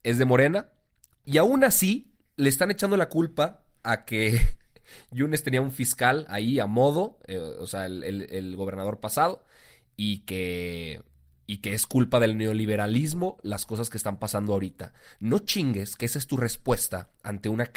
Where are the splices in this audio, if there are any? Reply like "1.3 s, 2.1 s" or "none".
none